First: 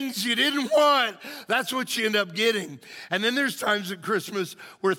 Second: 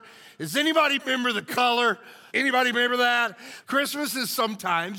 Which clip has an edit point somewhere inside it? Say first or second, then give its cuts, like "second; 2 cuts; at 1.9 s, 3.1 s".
second; 2 cuts; at 2.3 s, 3.6 s